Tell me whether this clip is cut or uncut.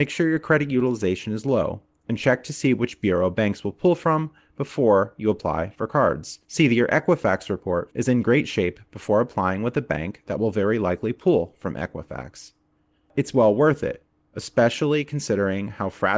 cut